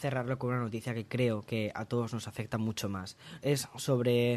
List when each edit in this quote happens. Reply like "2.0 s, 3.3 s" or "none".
3.4 s